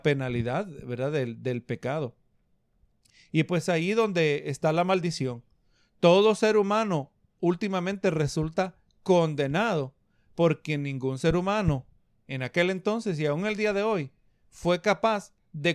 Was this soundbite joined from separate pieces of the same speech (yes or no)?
no